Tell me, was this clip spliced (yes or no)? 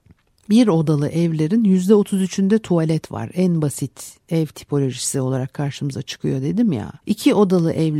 yes